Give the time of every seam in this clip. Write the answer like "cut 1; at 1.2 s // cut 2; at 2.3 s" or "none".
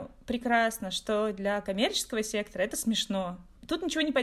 none